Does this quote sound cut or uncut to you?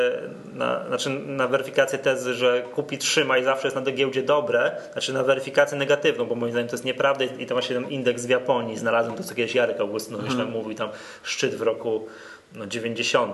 uncut